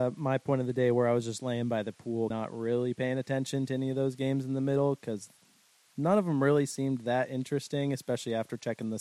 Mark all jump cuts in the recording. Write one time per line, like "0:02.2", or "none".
0:02.3